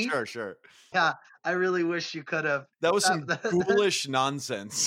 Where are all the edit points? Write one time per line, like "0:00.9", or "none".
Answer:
0:00.9
0:02.7